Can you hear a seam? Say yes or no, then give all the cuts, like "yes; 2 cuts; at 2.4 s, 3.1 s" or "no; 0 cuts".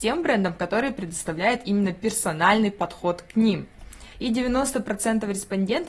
yes; 1 cut; at 4.1 s